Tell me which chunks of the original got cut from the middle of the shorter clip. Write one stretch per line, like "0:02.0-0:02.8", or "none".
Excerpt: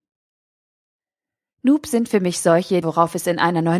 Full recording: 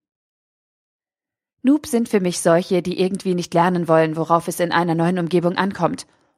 0:02.8-0:04.1